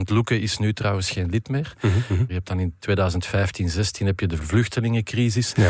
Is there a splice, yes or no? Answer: yes